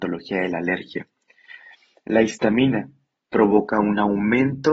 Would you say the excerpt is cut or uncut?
uncut